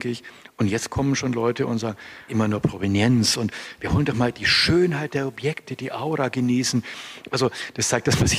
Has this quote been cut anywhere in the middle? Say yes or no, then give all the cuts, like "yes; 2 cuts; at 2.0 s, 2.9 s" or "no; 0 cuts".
yes; 1 cut; at 2.3 s